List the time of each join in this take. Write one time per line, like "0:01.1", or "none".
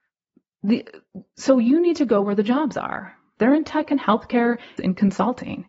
0:03.4
0:04.8